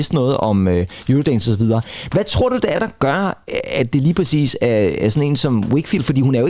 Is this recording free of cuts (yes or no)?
yes